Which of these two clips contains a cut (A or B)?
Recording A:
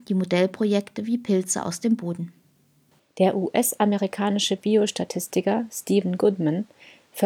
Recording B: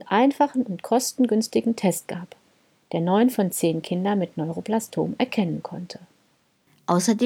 A